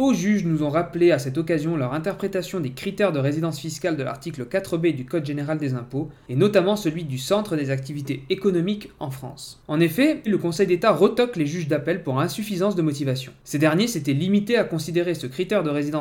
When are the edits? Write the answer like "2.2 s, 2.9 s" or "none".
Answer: 10.3 s